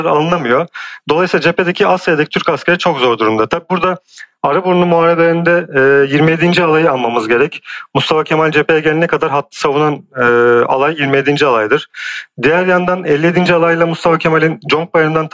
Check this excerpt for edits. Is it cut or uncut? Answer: uncut